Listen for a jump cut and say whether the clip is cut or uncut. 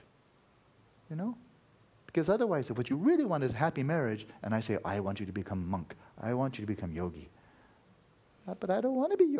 uncut